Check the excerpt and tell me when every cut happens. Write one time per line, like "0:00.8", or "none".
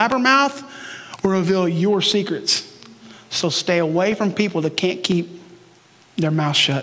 none